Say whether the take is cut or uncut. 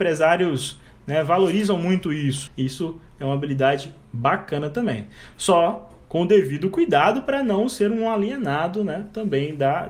cut